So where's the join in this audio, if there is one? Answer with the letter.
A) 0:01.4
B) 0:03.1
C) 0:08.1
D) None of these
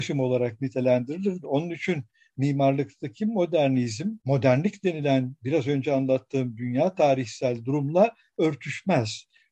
A